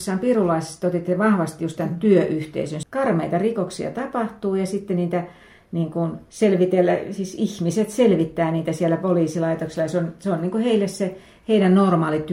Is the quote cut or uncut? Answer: cut